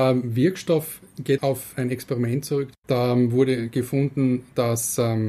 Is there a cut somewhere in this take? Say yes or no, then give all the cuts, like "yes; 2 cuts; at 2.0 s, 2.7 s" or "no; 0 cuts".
yes; 1 cut; at 1.4 s